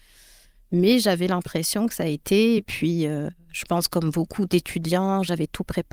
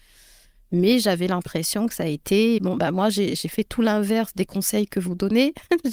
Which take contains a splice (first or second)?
second